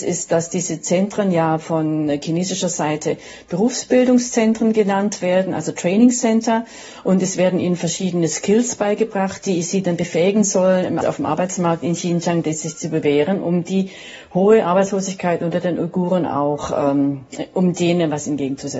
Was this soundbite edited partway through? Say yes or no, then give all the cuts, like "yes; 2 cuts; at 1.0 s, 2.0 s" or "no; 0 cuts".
yes; 1 cut; at 11.0 s